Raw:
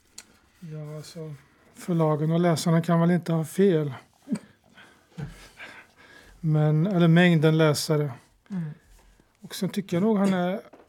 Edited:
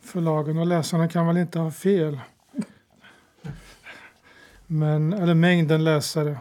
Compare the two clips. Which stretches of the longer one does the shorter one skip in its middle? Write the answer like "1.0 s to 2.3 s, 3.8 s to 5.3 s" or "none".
none